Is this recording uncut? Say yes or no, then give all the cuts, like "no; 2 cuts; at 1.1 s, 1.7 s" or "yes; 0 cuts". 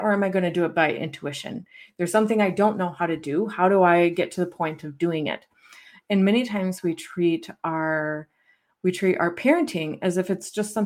yes; 0 cuts